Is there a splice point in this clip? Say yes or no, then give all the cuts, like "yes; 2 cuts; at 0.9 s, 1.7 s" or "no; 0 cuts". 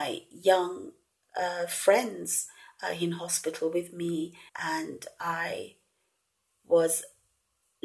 yes; 1 cut; at 4.5 s